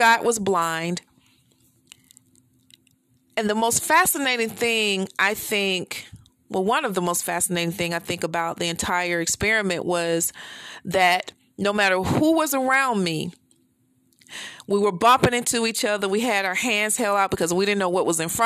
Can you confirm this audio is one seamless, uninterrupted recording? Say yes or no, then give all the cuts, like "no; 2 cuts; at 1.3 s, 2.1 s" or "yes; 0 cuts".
yes; 0 cuts